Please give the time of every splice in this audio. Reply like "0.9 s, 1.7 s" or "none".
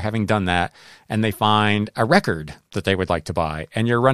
none